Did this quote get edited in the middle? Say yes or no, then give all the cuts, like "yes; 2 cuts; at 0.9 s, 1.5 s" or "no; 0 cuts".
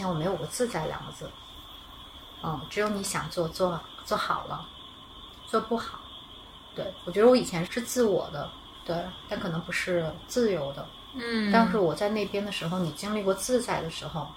yes; 1 cut; at 7.7 s